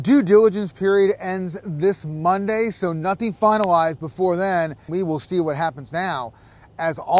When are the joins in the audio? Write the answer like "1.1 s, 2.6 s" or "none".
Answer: 4.9 s